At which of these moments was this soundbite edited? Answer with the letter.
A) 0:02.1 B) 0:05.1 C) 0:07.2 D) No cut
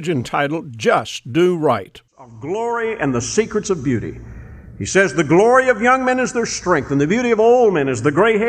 A